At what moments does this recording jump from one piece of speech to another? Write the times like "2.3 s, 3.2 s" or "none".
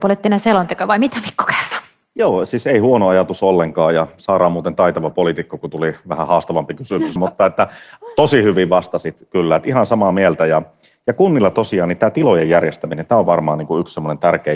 7.2 s